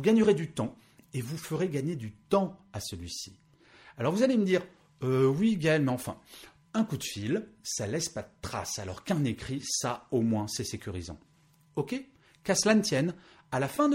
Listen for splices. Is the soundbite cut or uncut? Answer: uncut